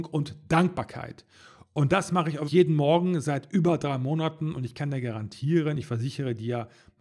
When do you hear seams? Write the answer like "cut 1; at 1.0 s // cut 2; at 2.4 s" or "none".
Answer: cut 1; at 2.5 s